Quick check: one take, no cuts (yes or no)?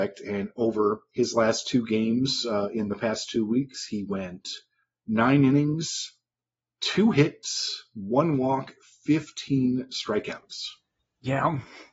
yes